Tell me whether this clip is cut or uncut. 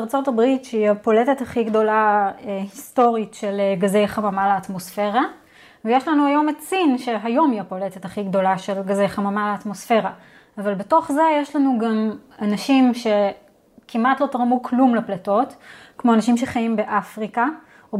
uncut